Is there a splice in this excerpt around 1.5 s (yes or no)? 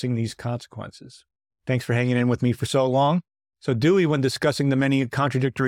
yes